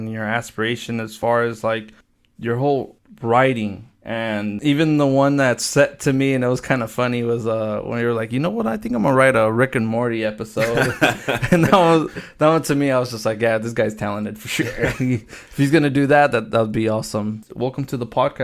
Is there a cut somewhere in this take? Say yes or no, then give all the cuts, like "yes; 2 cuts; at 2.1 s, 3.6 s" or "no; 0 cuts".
no; 0 cuts